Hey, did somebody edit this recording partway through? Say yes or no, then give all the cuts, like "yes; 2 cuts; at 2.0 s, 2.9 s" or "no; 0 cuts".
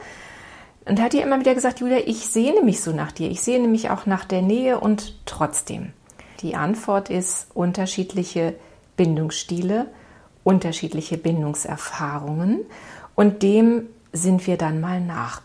yes; 1 cut; at 6.4 s